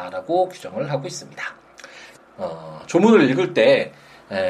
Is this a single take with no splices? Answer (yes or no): no